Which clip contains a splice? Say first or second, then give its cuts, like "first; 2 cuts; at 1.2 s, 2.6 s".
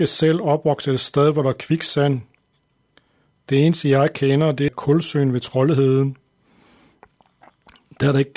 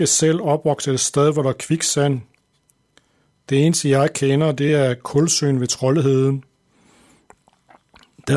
first; 1 cut; at 4.7 s